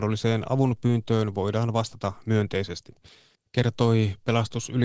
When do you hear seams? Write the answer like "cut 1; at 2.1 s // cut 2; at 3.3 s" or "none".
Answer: cut 1; at 3.3 s